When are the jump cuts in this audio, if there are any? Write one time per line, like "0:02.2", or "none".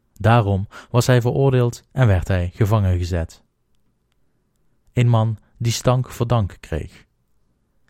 0:04.8